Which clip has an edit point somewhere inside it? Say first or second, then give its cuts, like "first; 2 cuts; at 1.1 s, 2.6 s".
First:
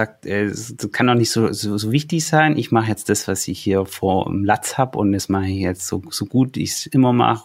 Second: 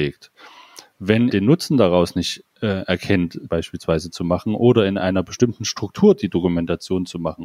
second; 2 cuts; at 1.3 s, 3.5 s